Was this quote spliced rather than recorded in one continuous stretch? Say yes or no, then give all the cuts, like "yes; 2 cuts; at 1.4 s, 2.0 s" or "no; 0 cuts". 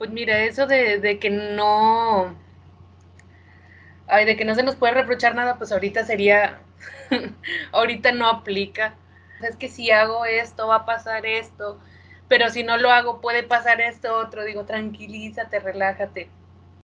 yes; 1 cut; at 9.4 s